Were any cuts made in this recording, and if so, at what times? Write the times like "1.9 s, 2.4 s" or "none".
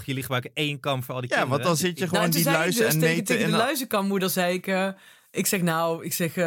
none